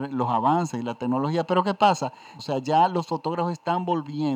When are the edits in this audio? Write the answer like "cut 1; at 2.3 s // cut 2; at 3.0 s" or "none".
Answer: cut 1; at 2.4 s